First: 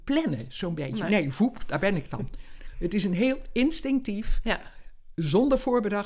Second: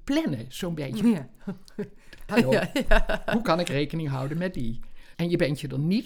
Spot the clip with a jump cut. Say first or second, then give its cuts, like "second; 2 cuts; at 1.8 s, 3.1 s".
second; 3 cuts; at 1.0 s, 2.3 s, 5.1 s